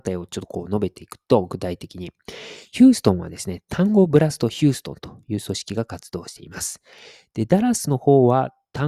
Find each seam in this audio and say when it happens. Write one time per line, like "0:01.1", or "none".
none